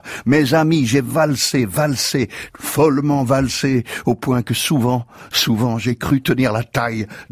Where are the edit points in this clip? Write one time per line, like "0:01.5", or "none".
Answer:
none